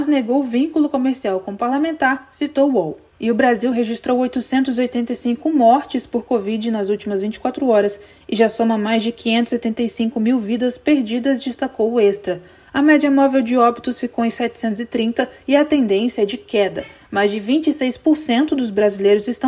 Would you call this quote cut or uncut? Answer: cut